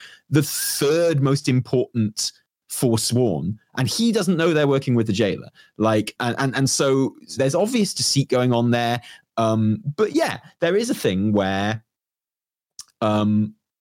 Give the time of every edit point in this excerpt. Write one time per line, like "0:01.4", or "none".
0:06.2
0:07.4
0:09.2